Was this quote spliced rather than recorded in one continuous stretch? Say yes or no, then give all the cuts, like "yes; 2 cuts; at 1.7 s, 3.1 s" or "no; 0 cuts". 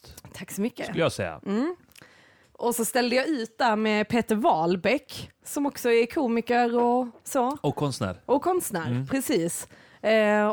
no; 0 cuts